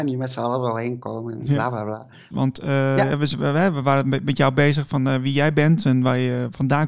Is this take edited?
yes; 1 cut; at 2.3 s

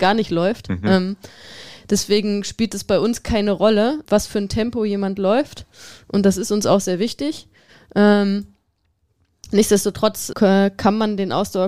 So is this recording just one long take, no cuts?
no; 2 cuts; at 4.0 s, 10.3 s

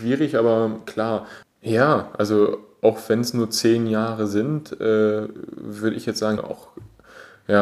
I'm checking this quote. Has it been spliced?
yes; 2 cuts; at 1.4 s, 6.4 s

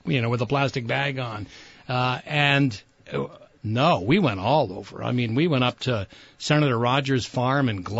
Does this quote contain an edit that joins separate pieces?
yes; 1 cut; at 3.6 s

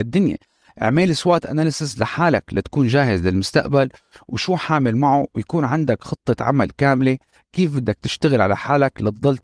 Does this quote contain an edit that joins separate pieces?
no; 0 cuts

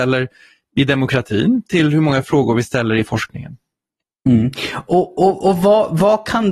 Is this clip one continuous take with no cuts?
yes; 0 cuts

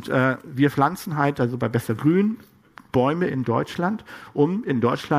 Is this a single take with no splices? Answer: yes; 0 cuts

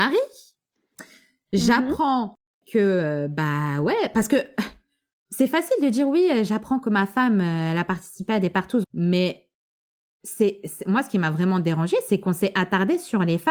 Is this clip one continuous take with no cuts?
no; 1 cut; at 8.8 s

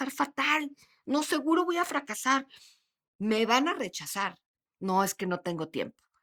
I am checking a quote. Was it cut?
yes; 1 cut; at 4.7 s

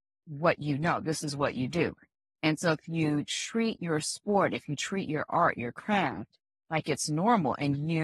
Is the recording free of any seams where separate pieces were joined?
yes; 0 cuts

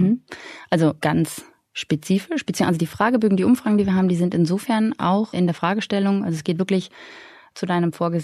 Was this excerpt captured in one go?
yes; 0 cuts

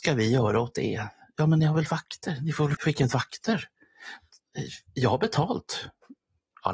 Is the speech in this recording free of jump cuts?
no; 1 cut; at 2.7 s

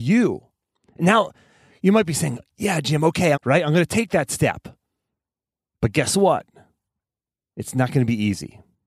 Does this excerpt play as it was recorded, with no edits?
no; 1 cut; at 3.3 s

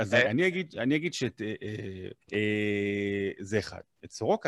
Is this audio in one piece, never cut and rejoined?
no; 1 cut; at 2.2 s

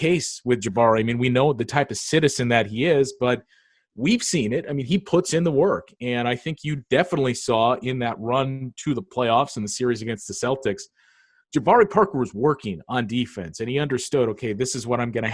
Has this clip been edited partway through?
no; 0 cuts

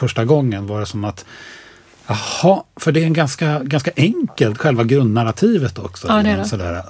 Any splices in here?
no; 0 cuts

